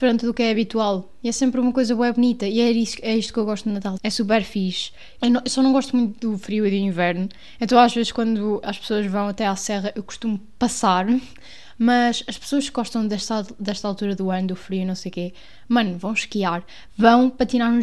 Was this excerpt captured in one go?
no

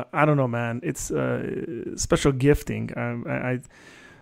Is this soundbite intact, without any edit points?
yes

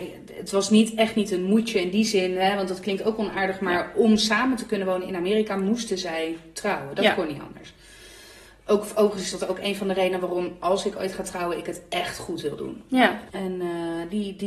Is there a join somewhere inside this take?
yes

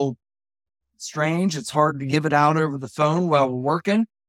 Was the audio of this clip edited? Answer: no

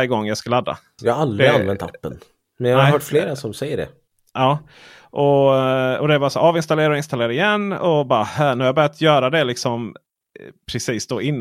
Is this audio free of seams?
no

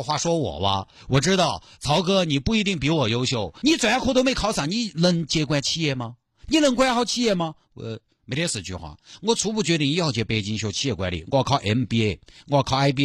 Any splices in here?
yes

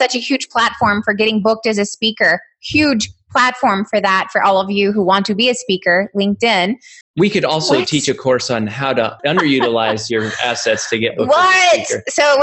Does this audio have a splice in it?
yes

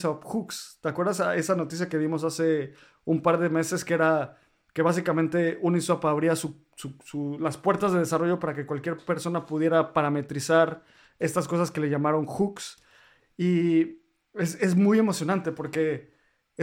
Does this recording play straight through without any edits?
yes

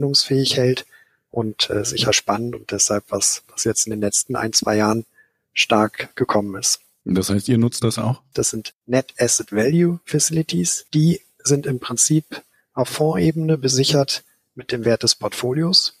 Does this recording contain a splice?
yes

